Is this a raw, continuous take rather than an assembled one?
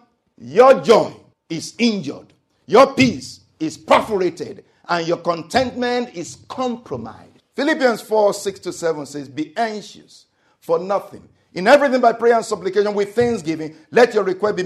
yes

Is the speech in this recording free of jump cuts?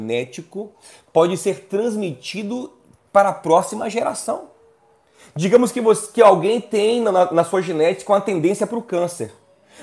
yes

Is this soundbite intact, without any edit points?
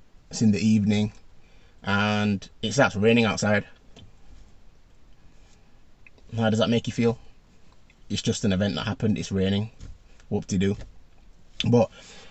no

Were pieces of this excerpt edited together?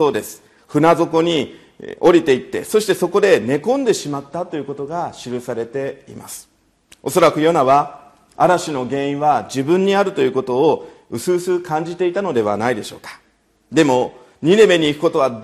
no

